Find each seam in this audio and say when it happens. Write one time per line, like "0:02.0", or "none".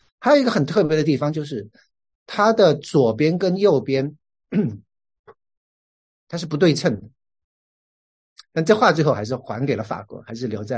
0:08.4